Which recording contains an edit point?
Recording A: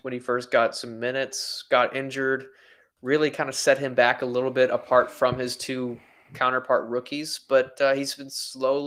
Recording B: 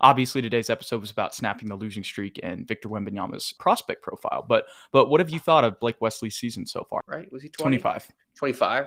B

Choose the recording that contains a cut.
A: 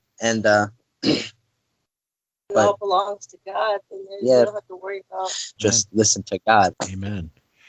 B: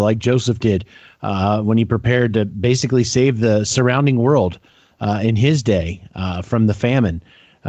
A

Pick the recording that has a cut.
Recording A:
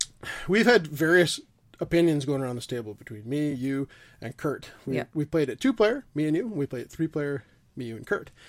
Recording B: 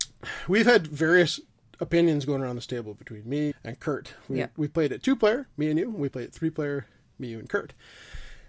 B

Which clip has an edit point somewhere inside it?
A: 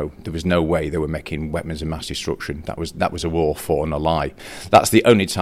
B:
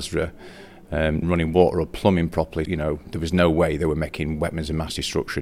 B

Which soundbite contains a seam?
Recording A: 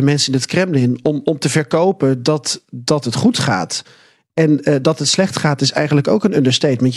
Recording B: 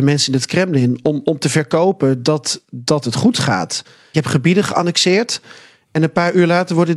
B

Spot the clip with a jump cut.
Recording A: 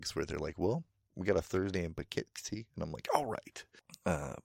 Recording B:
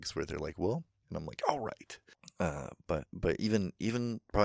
B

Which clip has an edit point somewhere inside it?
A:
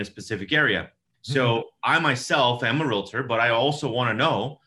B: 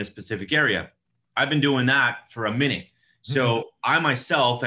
A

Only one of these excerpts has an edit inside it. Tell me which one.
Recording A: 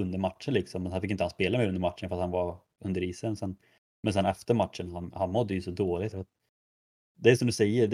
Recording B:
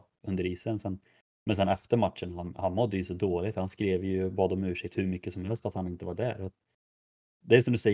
A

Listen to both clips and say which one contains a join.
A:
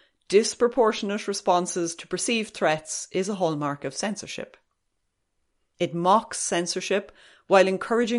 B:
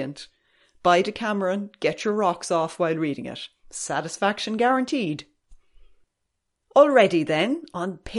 A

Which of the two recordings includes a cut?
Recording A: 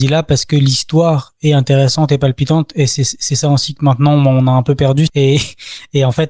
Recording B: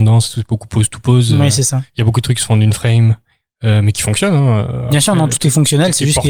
A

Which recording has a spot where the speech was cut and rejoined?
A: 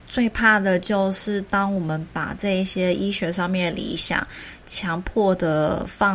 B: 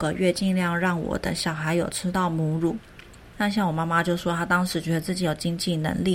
B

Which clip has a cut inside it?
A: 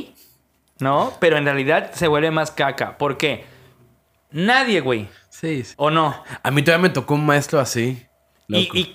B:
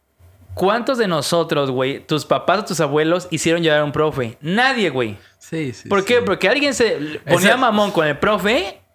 A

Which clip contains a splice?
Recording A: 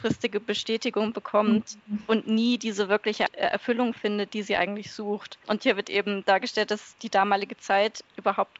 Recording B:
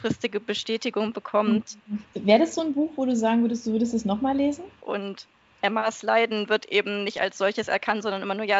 B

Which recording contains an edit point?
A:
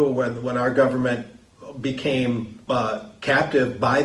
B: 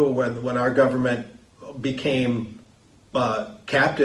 A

